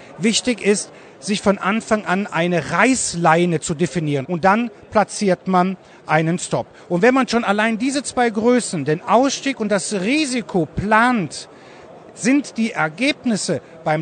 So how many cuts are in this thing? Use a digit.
1